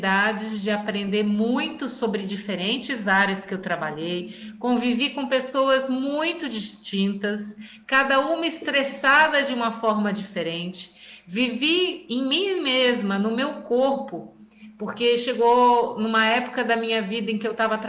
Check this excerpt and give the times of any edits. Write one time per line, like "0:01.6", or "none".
none